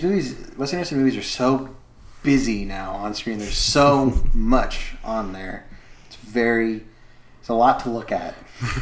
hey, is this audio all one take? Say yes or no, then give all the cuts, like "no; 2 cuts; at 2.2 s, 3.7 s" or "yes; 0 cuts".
yes; 0 cuts